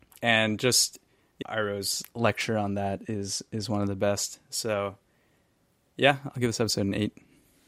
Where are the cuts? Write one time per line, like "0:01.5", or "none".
0:01.4

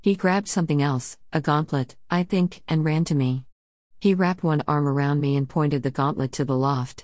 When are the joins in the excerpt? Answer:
0:04.7

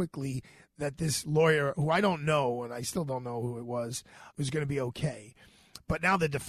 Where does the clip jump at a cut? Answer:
0:04.3

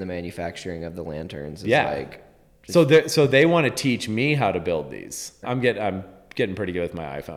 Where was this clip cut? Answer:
0:05.4

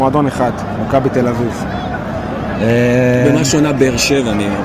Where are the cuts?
0:02.5

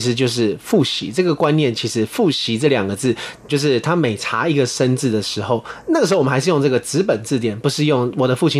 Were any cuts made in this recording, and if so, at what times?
0:03.5

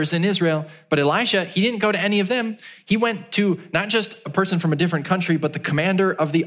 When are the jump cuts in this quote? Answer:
none

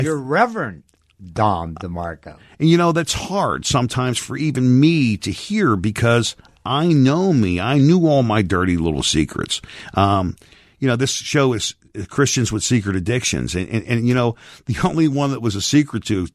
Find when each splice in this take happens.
none

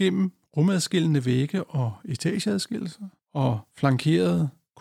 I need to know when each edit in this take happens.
none

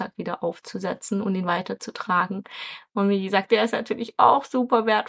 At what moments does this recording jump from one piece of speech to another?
0:03.5

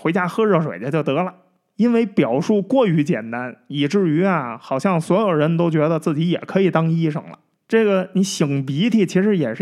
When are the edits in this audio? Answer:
0:07.5

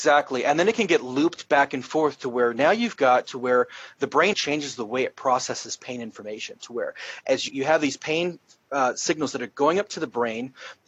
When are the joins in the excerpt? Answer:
0:04.3
0:07.5

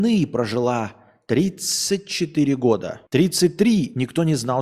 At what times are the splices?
0:03.1

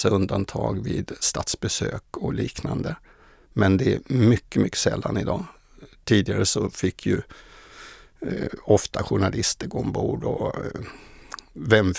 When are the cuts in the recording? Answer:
none

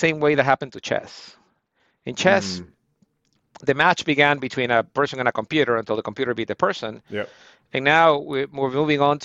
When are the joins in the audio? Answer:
none

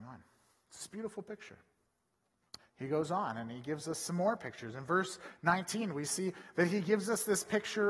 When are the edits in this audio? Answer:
0:02.6

